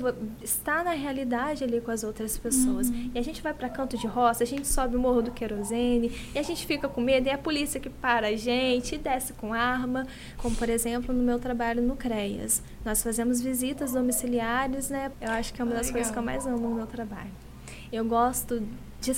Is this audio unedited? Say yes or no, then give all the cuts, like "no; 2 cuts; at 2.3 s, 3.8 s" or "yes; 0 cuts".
no; 3 cuts; at 10.4 s, 15.1 s, 17.9 s